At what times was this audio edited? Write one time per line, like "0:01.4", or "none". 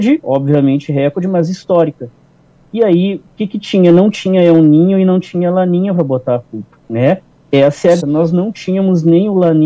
0:06.8
0:08.0